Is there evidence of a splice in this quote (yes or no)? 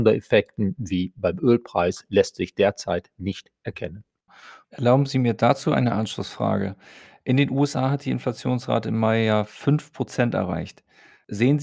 no